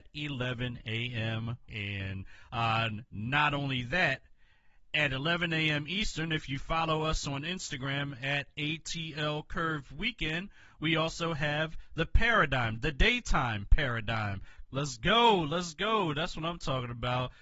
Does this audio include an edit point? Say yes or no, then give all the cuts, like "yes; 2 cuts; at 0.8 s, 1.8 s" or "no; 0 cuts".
yes; 2 cuts; at 1.7 s, 14.7 s